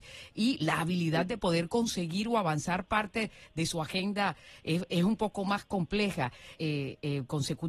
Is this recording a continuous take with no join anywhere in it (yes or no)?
no